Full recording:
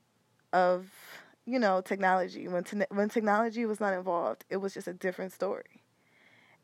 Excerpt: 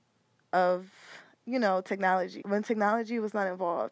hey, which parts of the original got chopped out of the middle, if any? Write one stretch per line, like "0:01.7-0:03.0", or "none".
0:02.4-0:02.9